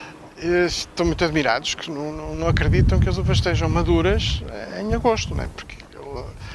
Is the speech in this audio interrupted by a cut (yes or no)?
no